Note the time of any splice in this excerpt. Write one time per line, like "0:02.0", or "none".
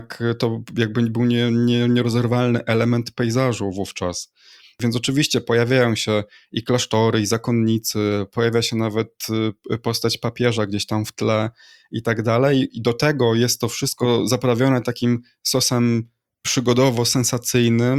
none